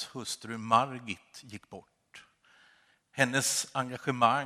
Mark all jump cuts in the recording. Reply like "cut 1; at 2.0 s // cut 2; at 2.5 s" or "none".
none